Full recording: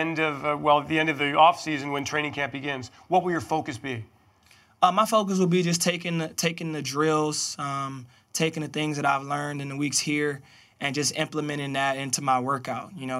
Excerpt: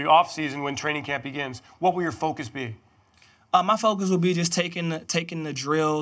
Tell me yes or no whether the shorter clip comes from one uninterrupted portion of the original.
yes